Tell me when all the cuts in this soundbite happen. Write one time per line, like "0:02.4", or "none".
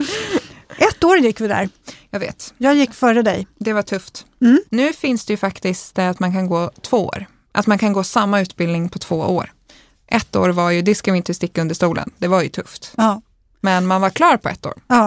0:04.7